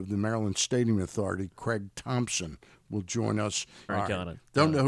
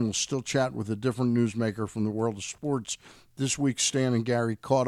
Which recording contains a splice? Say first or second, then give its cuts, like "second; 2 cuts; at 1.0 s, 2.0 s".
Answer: first; 1 cut; at 3.9 s